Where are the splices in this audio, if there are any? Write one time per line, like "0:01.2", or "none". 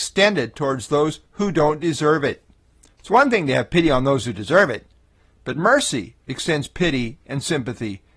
none